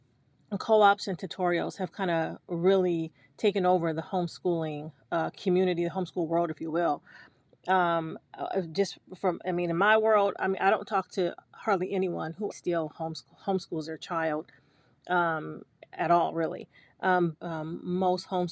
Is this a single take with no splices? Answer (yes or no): no